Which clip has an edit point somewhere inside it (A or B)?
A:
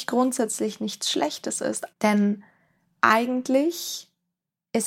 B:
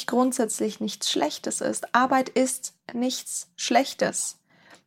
A